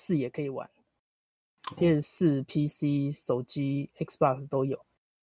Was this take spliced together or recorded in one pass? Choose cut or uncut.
uncut